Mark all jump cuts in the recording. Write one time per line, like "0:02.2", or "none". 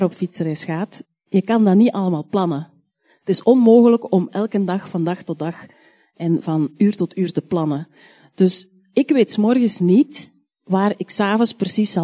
none